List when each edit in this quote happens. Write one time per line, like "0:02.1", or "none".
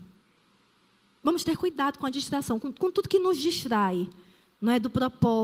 none